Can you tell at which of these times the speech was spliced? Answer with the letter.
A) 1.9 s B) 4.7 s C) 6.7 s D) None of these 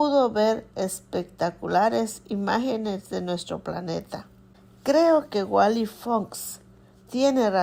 D